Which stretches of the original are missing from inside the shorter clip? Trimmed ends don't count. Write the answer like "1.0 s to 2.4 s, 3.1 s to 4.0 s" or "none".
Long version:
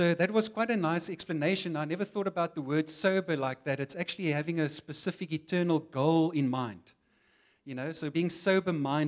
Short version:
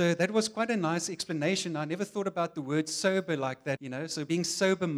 3.8 s to 7.6 s